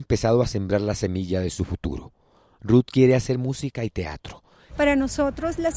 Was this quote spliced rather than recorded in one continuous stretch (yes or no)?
yes